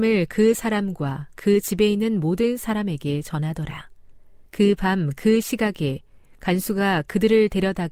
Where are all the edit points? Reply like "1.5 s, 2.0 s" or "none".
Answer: 4.5 s